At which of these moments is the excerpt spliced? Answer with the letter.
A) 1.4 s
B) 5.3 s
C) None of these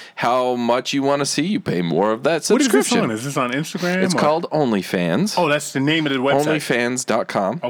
C